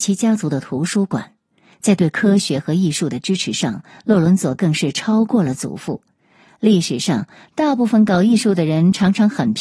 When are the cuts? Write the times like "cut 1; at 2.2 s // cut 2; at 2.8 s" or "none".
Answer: none